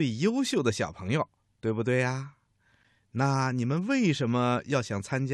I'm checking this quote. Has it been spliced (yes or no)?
no